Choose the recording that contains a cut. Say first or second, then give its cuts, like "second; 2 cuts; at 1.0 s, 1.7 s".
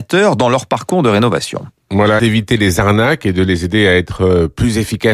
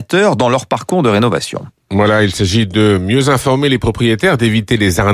first; 1 cut; at 2.2 s